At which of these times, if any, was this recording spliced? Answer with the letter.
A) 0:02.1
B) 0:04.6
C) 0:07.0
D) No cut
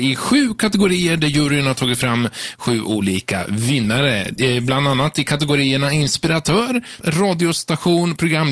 C